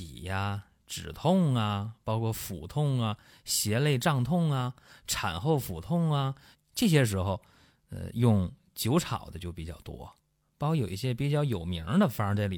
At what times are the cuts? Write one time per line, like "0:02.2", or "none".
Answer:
0:06.5